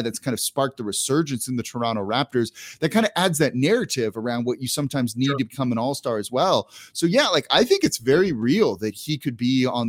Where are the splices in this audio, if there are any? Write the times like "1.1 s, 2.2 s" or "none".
none